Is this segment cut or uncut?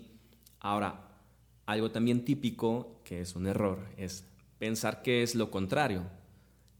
uncut